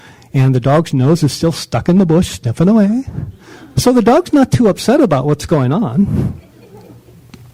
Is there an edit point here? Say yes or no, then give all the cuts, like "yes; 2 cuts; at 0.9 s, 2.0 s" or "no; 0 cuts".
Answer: no; 0 cuts